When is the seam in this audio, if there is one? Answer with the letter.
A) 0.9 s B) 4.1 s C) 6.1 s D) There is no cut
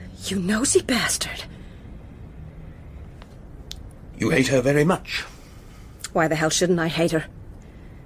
B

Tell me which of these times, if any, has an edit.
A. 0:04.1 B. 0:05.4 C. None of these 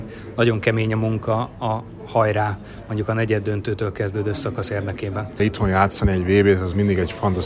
B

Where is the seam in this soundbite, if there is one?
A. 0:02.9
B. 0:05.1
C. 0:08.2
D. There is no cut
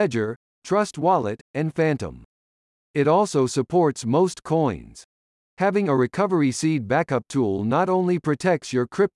D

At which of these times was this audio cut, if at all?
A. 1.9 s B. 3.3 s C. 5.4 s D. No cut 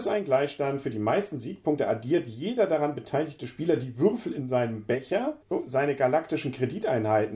C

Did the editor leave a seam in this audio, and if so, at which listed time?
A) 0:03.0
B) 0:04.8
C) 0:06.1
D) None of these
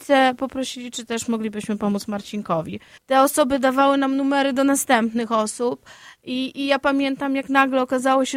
A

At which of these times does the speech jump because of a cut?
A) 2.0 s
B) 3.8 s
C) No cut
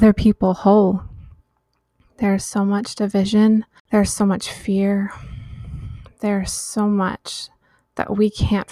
C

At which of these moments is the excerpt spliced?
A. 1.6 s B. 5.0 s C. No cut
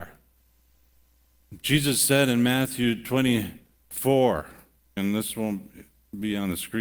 B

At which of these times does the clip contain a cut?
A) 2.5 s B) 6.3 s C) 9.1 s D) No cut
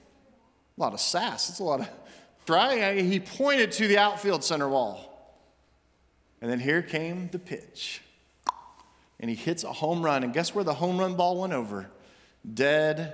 A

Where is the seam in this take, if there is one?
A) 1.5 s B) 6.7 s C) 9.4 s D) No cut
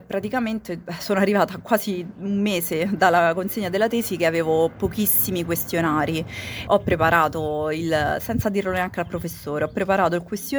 B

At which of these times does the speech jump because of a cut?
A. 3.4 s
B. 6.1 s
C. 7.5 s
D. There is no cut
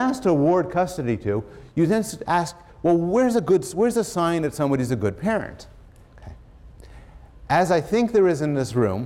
B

